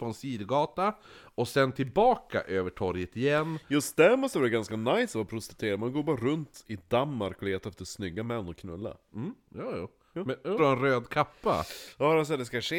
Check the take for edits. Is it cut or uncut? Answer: cut